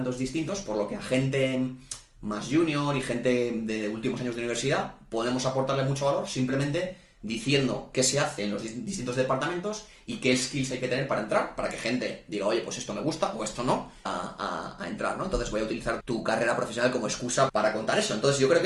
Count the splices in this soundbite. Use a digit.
3